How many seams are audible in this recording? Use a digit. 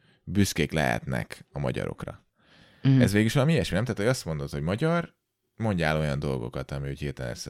0